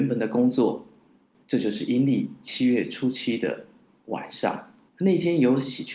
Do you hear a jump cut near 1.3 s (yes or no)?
yes